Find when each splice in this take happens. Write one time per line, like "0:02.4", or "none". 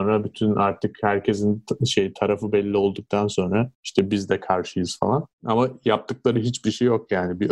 none